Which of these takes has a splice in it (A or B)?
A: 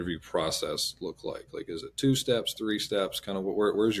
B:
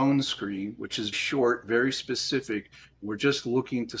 B